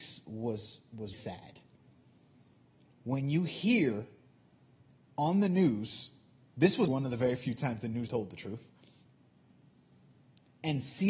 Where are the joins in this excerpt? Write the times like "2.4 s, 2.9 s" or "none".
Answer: 1.1 s, 6.9 s, 8.1 s